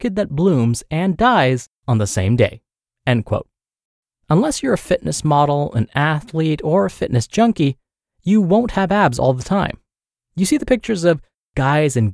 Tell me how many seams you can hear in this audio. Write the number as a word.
zero